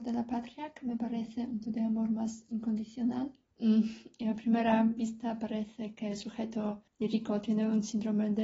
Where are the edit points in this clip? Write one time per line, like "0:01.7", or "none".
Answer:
0:01.6
0:03.5
0:06.9